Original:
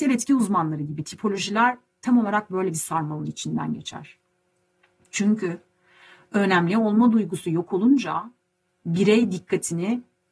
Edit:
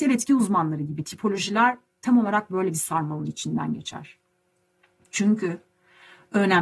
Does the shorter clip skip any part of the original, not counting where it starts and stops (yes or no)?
no